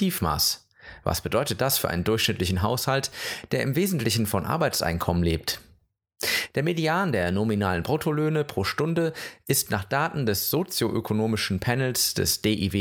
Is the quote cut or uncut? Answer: uncut